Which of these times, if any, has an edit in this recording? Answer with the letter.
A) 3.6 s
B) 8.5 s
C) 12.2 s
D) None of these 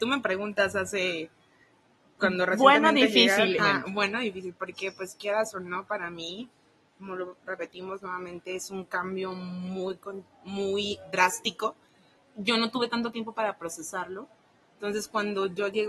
A